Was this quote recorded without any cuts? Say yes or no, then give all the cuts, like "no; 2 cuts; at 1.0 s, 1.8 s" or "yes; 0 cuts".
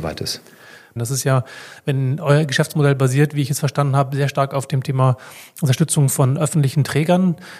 no; 1 cut; at 1.0 s